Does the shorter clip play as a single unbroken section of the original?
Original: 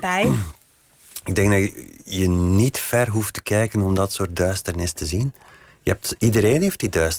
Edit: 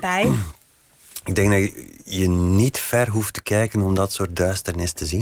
yes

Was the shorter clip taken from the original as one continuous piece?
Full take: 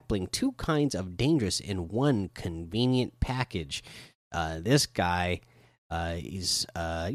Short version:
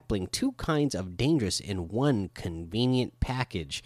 yes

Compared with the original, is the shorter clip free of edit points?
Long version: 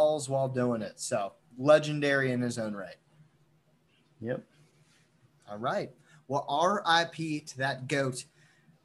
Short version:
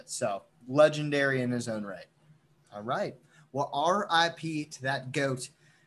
no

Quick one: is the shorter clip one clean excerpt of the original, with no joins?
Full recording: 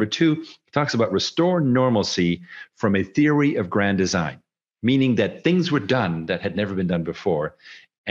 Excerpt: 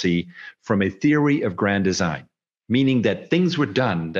yes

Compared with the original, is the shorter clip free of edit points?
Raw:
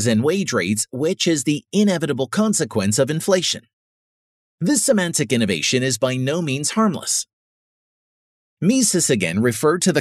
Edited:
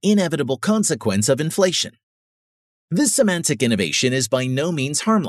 yes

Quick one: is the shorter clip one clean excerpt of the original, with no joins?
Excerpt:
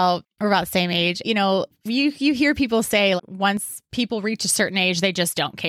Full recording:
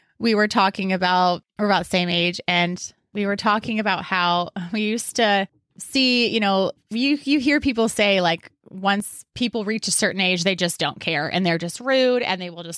no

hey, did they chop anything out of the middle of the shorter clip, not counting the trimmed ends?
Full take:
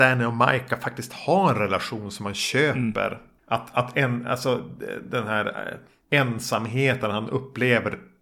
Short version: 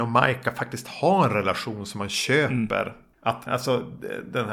yes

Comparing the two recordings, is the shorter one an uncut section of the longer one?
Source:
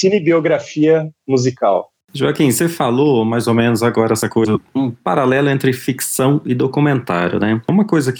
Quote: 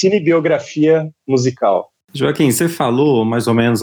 yes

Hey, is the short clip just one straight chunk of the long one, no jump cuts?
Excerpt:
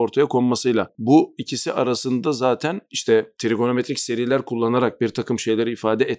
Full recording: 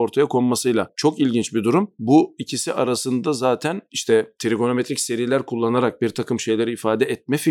no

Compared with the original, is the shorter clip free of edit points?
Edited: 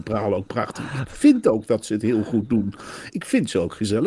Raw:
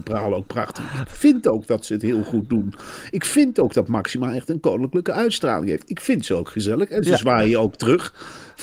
no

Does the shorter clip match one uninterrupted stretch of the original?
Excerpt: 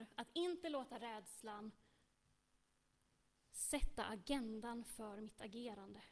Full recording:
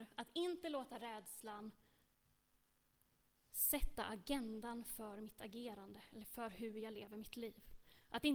yes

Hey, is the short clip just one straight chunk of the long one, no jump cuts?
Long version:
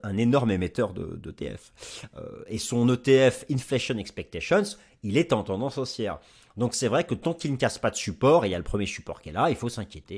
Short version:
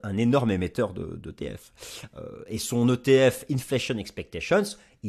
yes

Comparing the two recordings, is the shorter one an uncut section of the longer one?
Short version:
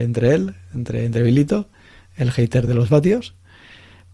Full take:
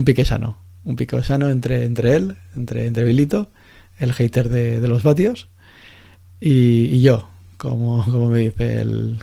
no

